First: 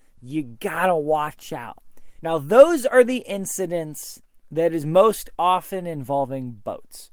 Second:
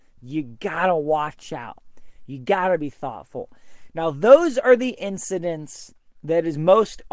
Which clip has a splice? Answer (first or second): first